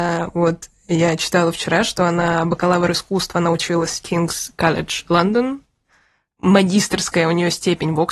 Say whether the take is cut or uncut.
uncut